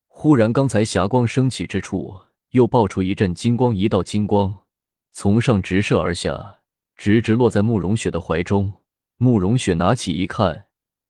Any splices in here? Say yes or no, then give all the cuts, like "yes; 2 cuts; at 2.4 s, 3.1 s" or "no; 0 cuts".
no; 0 cuts